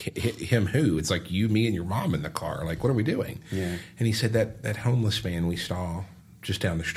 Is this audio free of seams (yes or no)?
yes